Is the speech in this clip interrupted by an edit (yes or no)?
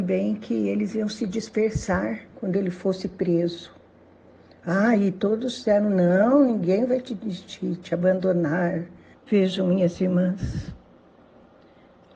yes